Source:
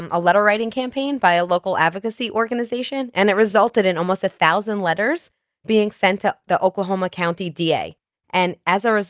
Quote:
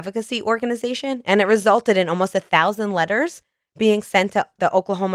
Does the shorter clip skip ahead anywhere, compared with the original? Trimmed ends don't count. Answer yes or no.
no